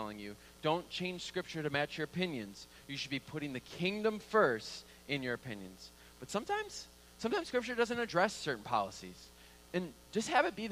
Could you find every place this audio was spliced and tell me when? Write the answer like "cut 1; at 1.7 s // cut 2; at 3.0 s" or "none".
none